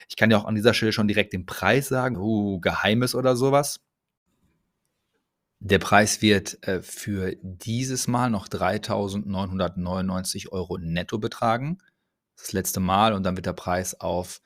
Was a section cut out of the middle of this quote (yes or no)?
yes